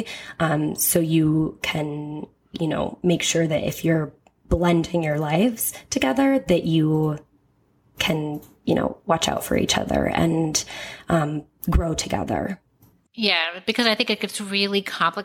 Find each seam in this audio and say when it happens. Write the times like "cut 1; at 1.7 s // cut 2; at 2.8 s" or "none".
cut 1; at 13.1 s